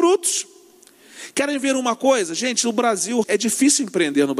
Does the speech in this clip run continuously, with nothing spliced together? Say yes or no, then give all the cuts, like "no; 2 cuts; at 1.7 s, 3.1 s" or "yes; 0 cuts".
no; 1 cut; at 3.2 s